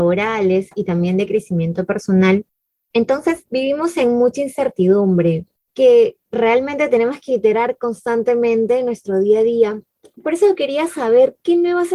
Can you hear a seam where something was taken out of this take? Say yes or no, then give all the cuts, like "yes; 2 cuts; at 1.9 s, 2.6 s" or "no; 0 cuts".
yes; 1 cut; at 3.5 s